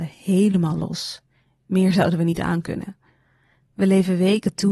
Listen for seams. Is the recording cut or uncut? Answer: uncut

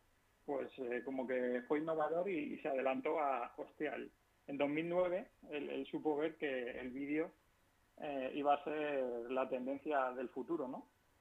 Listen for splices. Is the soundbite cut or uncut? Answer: uncut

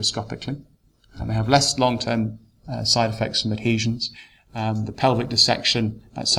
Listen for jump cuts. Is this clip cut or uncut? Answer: uncut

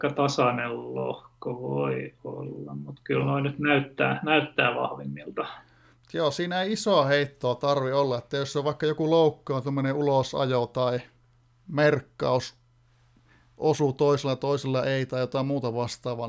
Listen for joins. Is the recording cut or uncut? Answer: uncut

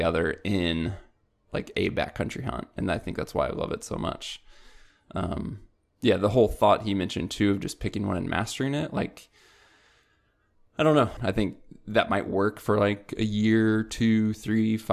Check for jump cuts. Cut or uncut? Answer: cut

